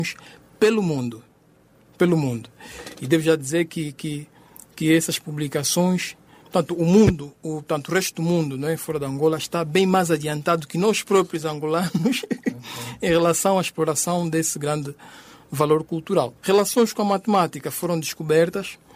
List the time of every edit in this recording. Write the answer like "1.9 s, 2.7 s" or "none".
16.4 s